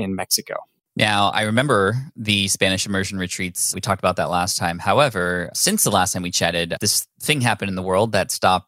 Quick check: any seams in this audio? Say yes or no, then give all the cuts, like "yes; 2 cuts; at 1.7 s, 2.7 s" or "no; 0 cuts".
no; 0 cuts